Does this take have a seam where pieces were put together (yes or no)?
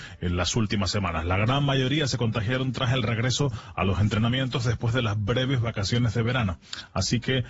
no